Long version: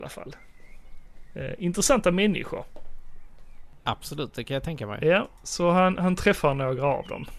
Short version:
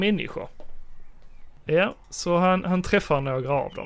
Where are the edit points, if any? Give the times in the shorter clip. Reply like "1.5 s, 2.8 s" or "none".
1.7 s